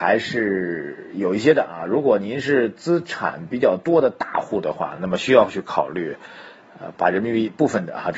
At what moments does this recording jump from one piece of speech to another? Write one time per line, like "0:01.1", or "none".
none

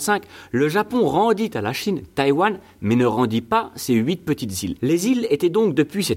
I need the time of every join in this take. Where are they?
0:04.8

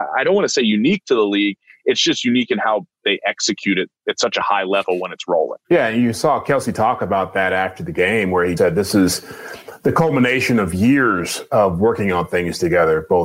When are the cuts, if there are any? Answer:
0:05.6
0:08.6

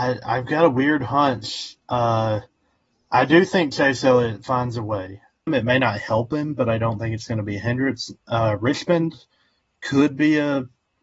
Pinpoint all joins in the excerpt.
0:05.5

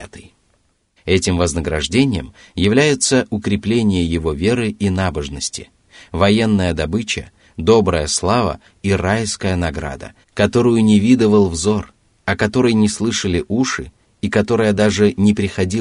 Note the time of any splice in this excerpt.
0:01.0
0:10.2

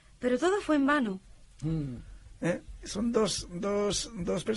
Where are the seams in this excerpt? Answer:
0:01.6

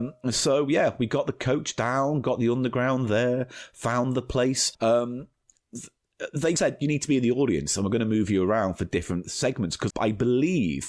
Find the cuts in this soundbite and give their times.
0:04.7
0:06.6
0:09.9

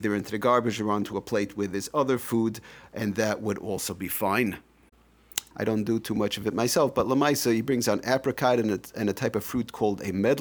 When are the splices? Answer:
0:05.5

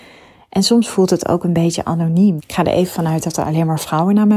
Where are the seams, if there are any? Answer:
0:02.4

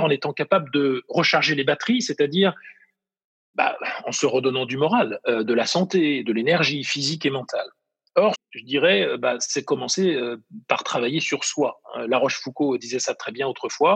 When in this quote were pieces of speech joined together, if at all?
0:08.3

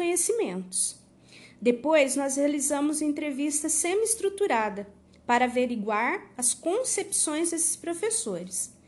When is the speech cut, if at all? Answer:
none

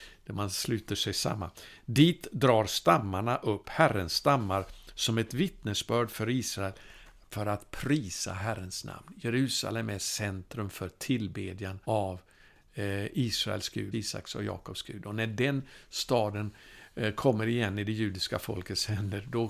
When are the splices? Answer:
0:11.8
0:13.9

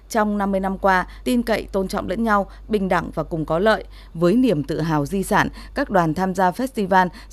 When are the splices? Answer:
0:01.2
0:04.1

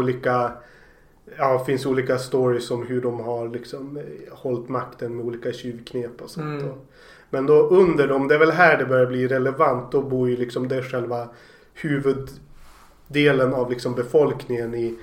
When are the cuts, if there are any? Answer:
none

